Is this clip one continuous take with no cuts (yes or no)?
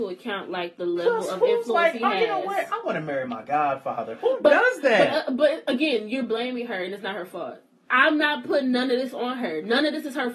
yes